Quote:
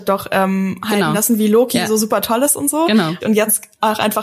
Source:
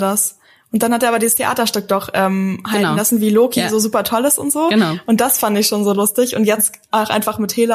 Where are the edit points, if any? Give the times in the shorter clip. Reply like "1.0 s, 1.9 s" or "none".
3.2 s